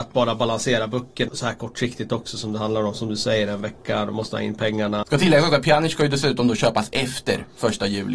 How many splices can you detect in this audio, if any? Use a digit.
2